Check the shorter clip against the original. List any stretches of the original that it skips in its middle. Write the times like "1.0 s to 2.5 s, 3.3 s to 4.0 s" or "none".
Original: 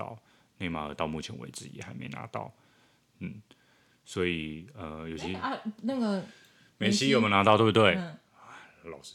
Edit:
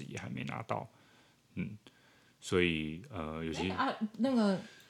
none